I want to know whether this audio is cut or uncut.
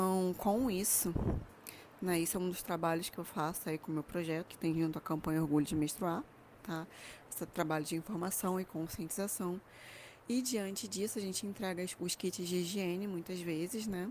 cut